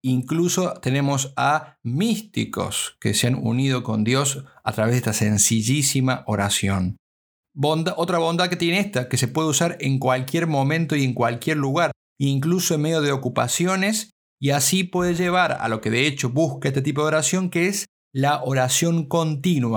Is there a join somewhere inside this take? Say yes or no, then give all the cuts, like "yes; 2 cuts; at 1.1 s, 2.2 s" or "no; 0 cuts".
no; 0 cuts